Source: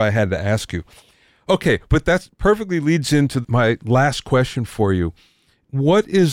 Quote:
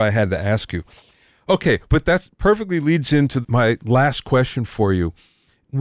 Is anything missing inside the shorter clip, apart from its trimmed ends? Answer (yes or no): no